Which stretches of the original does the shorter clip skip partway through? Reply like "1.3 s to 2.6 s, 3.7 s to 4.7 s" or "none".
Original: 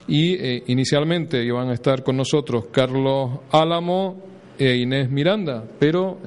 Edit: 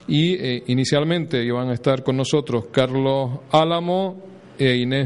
none